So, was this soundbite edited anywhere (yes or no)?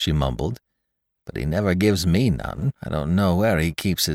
yes